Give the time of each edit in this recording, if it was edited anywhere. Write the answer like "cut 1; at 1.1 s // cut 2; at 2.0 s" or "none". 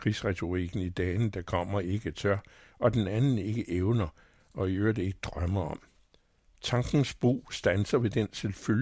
none